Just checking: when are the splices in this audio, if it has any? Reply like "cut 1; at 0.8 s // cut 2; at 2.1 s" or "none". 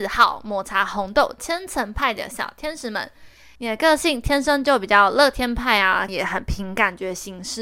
cut 1; at 3.6 s // cut 2; at 6.1 s